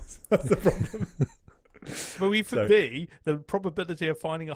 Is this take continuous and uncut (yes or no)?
no